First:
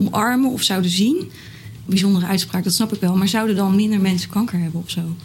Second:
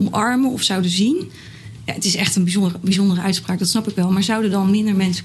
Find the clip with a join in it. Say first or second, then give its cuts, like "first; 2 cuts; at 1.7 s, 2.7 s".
first; 1 cut; at 1.9 s